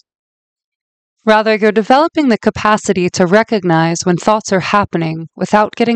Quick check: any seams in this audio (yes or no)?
no